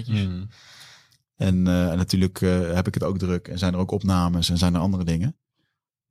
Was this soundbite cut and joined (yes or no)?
no